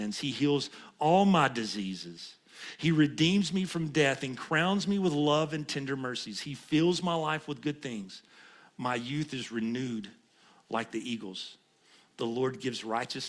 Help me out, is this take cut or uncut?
uncut